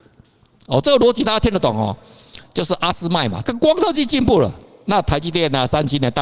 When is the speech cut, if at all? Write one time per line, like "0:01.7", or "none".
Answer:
0:02.4
0:03.4